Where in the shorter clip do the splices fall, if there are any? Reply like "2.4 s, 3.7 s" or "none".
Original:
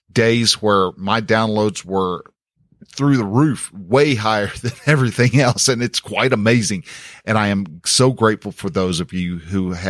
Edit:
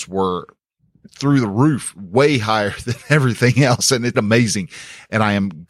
4.1 s